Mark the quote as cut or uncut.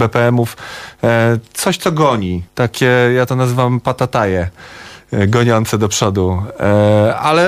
cut